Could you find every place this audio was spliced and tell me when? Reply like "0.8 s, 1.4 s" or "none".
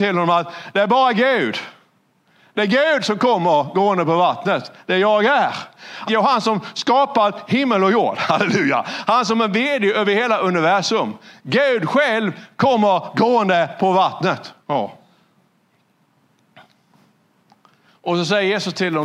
6.1 s, 14.6 s